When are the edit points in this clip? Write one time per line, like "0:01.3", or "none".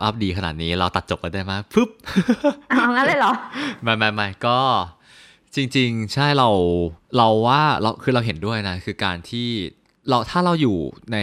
0:07.0